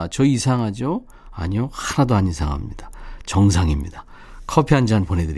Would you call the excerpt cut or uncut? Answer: uncut